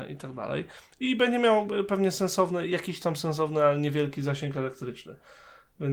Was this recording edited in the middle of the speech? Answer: no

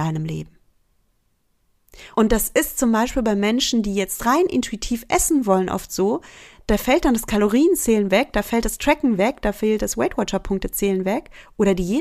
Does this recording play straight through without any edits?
no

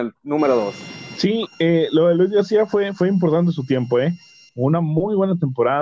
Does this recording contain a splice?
yes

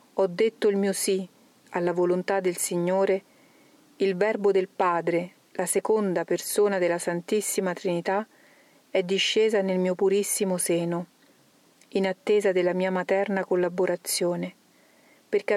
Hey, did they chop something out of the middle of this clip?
no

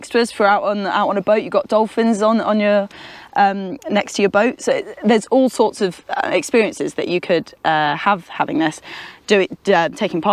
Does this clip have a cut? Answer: no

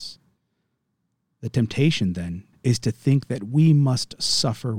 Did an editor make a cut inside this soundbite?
yes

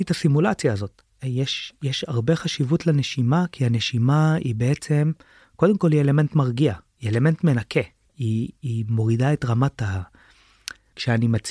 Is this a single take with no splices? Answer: no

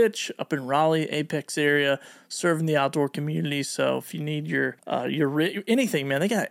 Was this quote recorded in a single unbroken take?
no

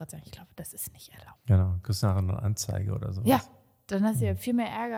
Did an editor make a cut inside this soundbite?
yes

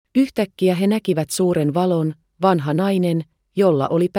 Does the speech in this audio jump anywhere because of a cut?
yes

